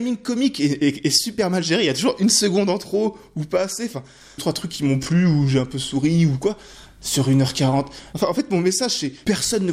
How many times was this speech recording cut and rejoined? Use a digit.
1